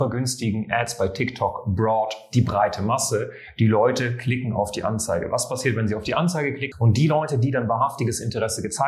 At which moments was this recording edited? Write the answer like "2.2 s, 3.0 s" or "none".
6.7 s